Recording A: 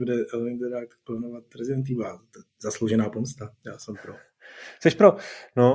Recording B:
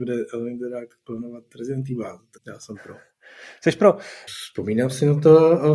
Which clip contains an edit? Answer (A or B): B